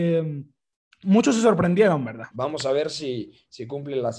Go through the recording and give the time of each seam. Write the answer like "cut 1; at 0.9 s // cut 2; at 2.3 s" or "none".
cut 1; at 2.3 s